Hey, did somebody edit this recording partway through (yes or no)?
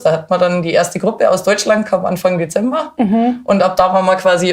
no